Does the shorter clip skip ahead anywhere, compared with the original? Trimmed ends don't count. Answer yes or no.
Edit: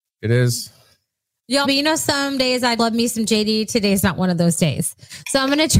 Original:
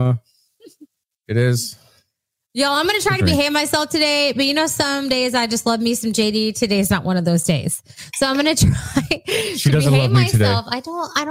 yes